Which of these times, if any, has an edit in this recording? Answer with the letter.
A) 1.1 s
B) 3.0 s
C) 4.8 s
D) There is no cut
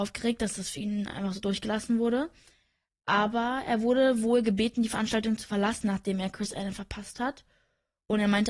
D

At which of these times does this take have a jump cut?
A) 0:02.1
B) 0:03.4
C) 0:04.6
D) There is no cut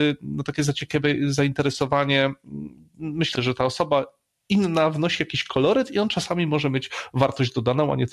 B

